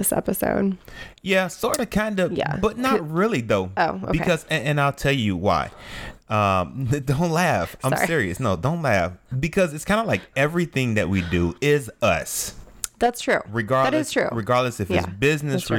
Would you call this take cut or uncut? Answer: uncut